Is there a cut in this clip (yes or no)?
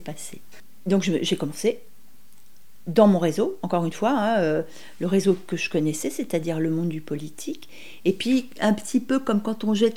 no